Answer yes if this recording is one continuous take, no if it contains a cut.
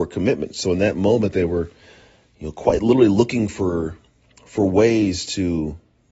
yes